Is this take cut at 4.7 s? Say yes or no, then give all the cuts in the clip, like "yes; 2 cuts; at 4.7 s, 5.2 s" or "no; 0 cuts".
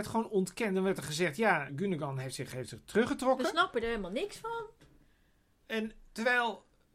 no; 1 cut; at 1.7 s